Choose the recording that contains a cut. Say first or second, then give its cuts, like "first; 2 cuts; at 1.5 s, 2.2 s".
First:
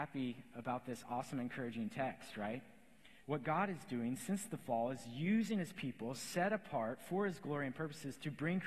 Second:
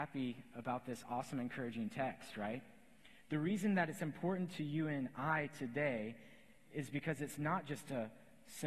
first; 1 cut; at 3.2 s